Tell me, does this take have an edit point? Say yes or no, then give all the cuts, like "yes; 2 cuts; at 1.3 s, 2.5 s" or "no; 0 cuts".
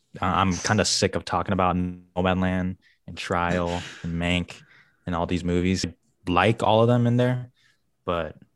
yes; 1 cut; at 5.8 s